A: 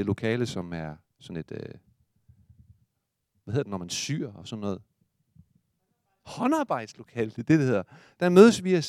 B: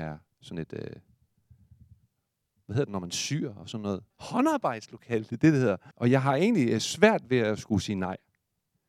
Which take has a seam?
B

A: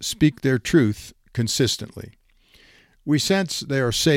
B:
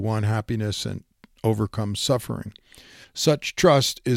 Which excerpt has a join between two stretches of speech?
B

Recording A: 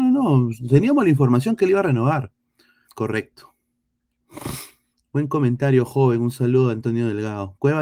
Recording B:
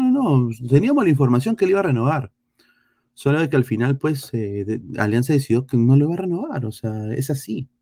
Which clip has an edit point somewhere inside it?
A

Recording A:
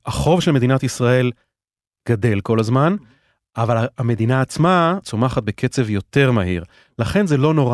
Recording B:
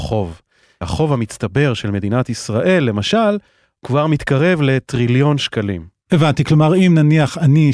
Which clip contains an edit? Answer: A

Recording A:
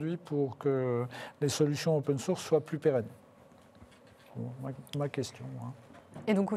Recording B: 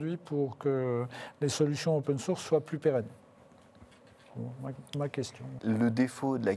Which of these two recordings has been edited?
B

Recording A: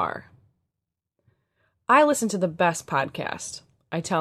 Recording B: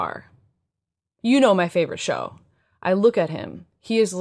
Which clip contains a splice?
B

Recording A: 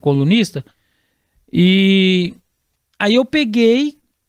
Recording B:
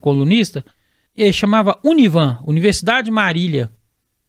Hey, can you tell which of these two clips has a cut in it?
B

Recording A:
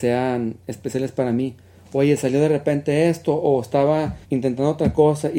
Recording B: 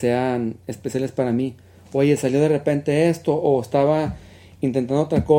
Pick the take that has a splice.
A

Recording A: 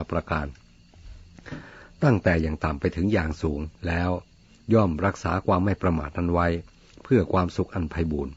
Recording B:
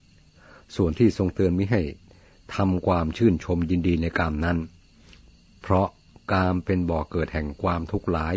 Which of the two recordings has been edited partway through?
A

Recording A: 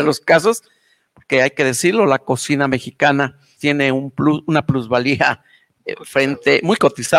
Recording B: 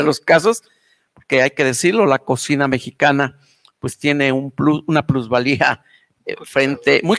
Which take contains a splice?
A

